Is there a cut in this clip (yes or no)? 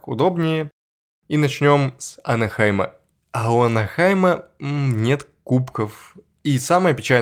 no